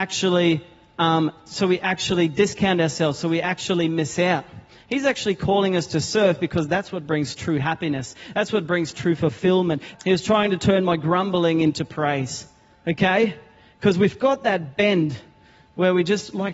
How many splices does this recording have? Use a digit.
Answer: 1